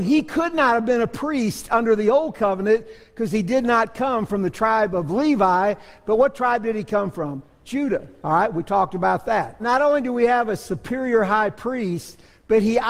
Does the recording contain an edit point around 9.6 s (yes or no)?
yes